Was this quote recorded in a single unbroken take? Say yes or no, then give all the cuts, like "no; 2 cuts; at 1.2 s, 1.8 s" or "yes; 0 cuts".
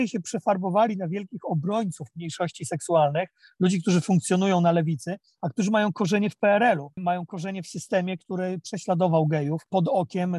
yes; 0 cuts